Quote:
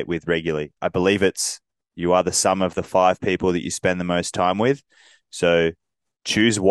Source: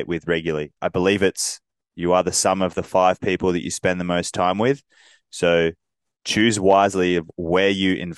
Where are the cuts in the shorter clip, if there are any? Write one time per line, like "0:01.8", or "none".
none